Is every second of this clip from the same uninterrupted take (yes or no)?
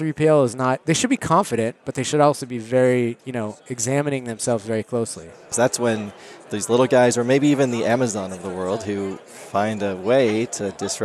no